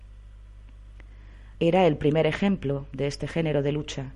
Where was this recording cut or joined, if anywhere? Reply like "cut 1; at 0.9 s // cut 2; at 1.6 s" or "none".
cut 1; at 1.5 s